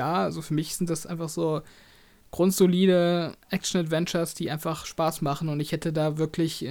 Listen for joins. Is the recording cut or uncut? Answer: uncut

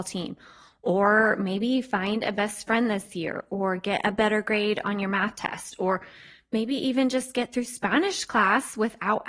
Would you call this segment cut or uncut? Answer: uncut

